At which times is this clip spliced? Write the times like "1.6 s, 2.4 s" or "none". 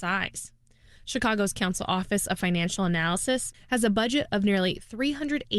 3.5 s